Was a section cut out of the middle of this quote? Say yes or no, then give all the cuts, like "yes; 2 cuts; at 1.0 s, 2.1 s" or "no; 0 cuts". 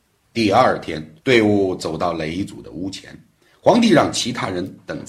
yes; 1 cut; at 1.2 s